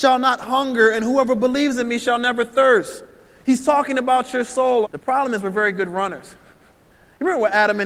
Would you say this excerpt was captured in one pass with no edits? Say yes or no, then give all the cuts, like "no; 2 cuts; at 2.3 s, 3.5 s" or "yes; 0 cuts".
no; 1 cut; at 4.8 s